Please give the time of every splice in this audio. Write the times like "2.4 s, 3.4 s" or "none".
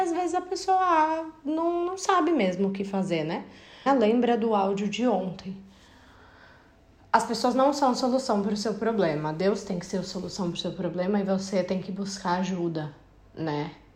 3.9 s